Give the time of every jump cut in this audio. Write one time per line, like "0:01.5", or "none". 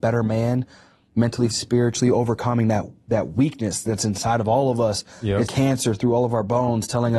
0:01.5
0:05.5